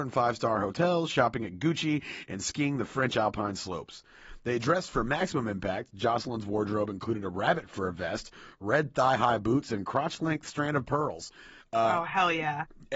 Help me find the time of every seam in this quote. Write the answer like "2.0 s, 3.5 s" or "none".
none